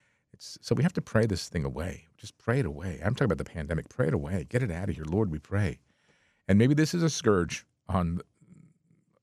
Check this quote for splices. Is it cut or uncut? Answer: uncut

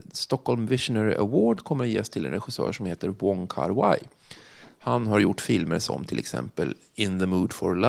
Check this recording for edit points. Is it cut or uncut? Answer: uncut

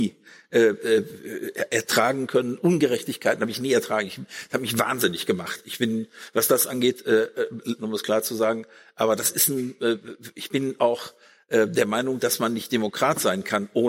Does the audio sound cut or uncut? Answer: cut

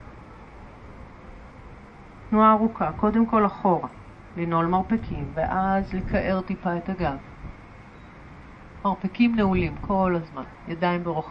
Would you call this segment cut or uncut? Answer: uncut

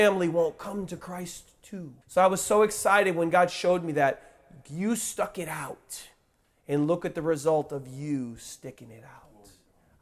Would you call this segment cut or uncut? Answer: cut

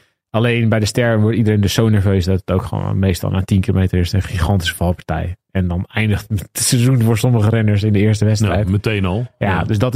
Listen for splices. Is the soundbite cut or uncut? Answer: uncut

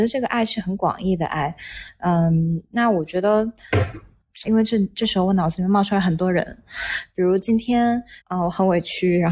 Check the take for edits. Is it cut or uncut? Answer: cut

